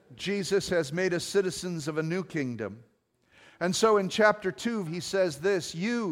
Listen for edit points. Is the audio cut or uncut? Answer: cut